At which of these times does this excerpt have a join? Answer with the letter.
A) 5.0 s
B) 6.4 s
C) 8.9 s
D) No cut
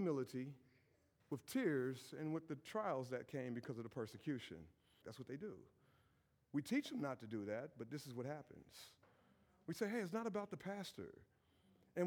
A